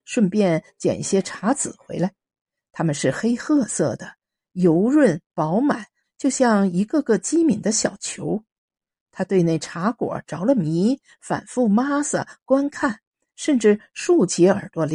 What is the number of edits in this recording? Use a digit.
1